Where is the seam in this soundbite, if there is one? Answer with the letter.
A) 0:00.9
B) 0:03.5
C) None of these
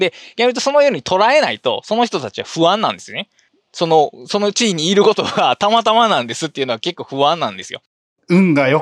C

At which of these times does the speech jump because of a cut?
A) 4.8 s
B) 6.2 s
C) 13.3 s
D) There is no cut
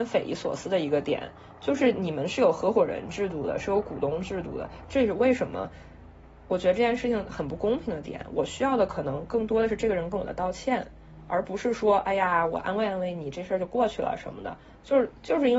A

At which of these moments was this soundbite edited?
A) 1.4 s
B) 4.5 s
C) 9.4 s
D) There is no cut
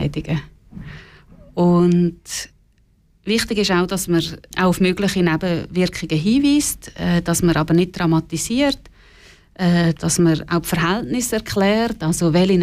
B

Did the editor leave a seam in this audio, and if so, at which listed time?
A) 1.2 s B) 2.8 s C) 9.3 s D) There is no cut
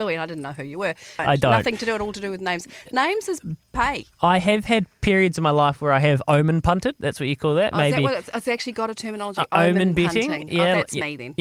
A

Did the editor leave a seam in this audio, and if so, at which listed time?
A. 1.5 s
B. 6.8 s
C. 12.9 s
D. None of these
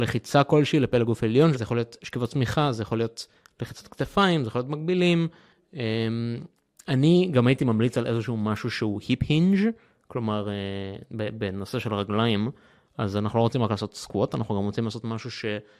A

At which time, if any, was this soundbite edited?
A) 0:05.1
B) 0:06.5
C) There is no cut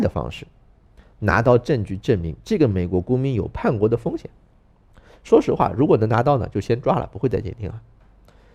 C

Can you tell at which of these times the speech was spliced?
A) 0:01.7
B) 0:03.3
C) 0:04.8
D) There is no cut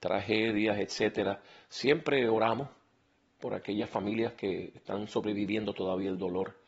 C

